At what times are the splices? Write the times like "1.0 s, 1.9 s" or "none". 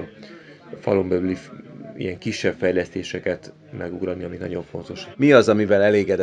5.1 s

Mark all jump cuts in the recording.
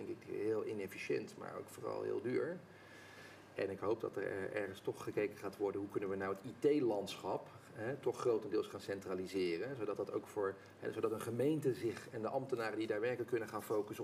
none

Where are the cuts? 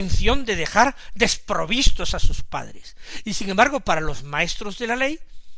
none

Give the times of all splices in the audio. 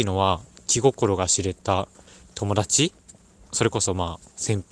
none

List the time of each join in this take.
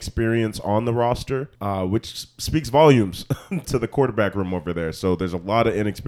1.6 s, 3.6 s

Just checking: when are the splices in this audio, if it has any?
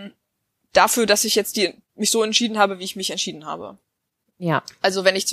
1.8 s

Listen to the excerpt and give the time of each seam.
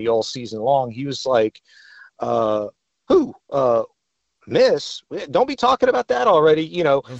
none

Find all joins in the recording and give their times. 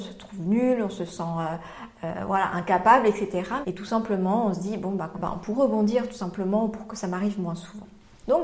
3.6 s, 5.1 s

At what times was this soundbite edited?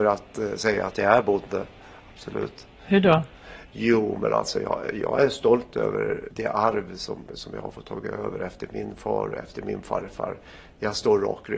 none

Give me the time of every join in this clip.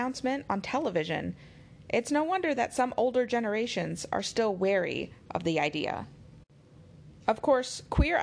none

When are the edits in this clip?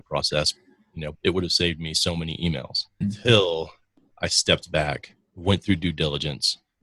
1.1 s, 3.0 s

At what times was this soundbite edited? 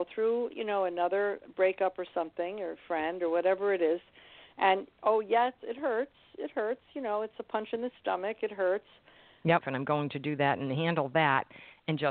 9.6 s

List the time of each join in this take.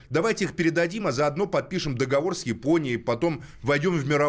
none

